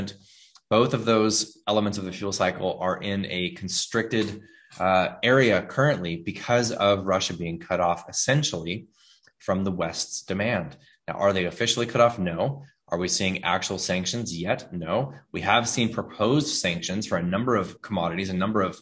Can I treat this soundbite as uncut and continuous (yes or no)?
no